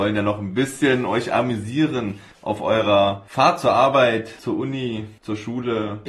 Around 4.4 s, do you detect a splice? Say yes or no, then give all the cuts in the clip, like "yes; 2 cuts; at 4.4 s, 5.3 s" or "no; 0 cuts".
no; 0 cuts